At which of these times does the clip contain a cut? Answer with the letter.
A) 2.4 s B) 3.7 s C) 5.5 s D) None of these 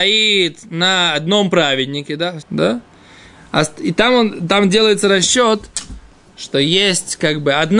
A